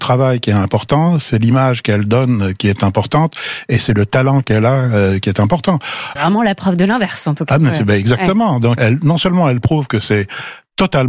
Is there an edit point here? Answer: yes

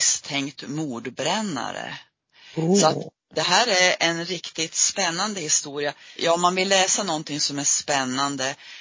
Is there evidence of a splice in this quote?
yes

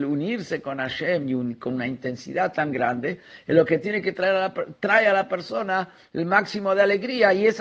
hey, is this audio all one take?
yes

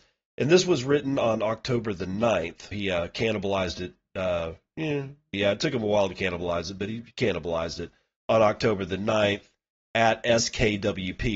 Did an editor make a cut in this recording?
yes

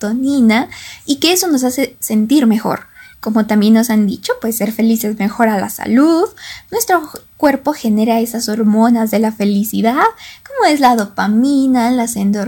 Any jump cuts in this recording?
yes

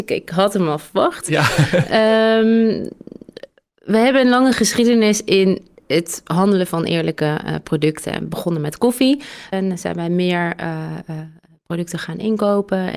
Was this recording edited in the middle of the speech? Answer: yes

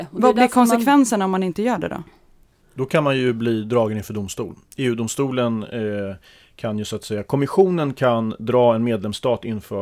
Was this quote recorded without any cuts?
yes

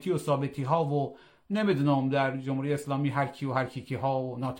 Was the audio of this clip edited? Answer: no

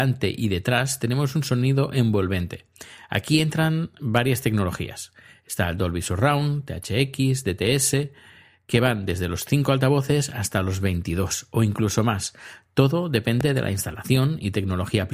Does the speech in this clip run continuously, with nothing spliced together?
yes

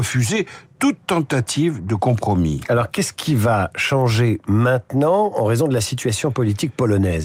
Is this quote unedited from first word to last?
yes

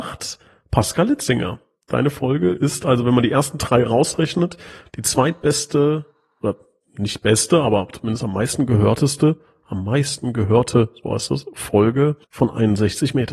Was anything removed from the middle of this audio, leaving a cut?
yes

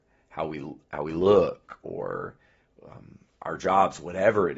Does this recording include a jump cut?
no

